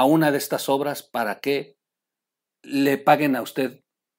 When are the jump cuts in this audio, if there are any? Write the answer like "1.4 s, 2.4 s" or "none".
none